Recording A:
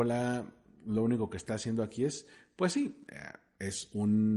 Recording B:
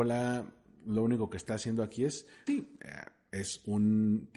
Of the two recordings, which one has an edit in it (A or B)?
B